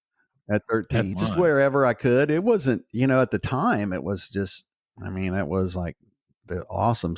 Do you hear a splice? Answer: yes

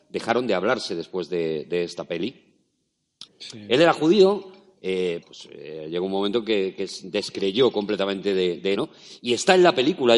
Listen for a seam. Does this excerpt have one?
yes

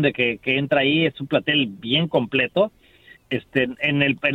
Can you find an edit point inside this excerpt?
yes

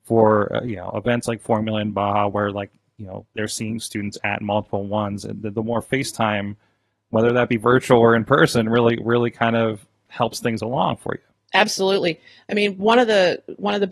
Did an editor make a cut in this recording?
no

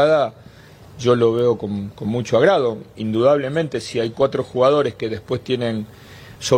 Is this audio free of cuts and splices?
yes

